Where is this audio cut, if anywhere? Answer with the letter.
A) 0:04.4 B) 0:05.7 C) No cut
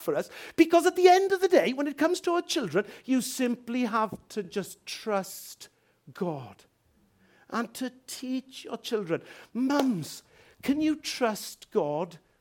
C